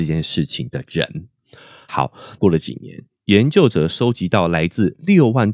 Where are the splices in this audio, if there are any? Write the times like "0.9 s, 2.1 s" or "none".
2.4 s